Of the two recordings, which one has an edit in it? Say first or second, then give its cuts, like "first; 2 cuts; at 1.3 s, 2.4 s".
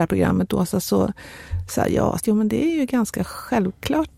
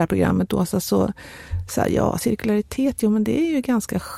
first; 1 cut; at 2.2 s